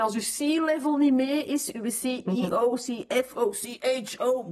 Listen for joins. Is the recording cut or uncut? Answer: uncut